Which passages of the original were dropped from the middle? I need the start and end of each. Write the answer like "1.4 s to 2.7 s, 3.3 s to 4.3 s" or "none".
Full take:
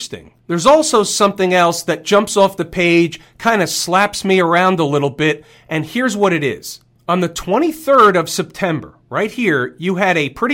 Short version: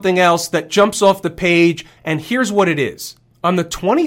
3.3 s to 5.6 s

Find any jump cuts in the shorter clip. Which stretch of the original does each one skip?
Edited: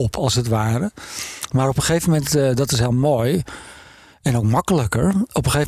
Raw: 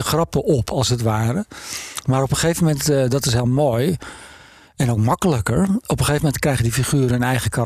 none

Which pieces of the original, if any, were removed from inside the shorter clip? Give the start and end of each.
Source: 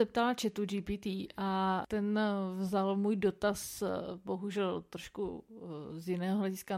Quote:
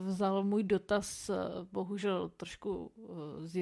none

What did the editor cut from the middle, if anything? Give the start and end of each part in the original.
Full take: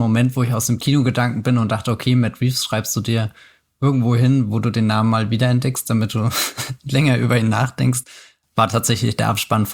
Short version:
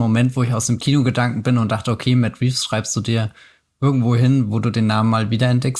none

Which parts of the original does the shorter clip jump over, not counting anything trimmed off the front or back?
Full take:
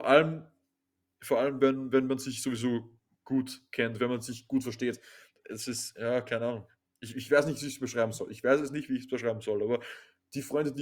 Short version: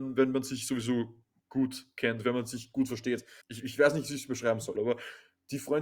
5.2 s to 6.9 s, 8.3 s to 9.6 s

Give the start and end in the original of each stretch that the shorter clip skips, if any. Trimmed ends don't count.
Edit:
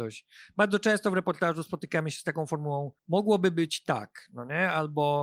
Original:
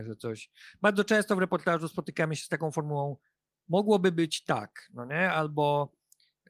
3.2 s to 3.6 s

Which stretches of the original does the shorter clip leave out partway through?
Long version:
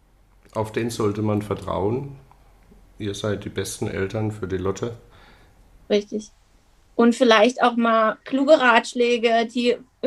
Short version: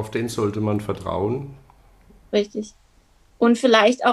2.8 s to 5.8 s

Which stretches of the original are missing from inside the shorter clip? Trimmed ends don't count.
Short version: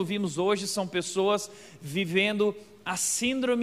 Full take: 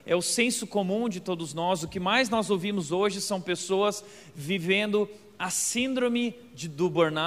none

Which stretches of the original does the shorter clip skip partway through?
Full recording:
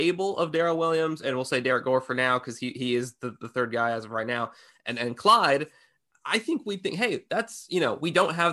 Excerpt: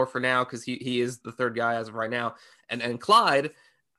3.1 s to 3.4 s

